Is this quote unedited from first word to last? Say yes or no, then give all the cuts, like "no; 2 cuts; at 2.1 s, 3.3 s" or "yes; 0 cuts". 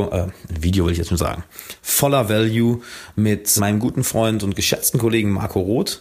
no; 2 cuts; at 1.8 s, 3.6 s